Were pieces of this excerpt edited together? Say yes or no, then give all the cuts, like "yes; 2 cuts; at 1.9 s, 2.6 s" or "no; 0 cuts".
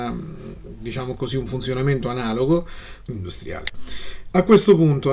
yes; 1 cut; at 3.0 s